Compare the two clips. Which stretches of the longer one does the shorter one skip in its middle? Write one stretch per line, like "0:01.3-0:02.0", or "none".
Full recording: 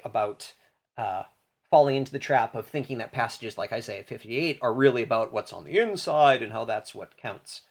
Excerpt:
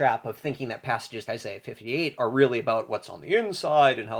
0:03.6-0:03.7